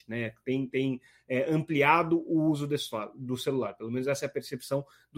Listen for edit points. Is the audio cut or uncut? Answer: uncut